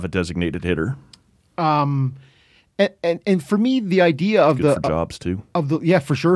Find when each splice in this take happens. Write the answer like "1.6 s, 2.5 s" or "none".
none